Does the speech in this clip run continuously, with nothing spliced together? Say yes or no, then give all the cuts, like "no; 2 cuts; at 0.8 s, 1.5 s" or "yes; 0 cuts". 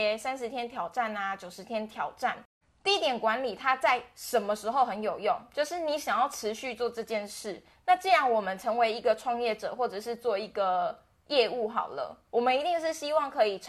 yes; 0 cuts